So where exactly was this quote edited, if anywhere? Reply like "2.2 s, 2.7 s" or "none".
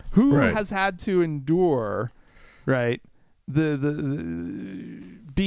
none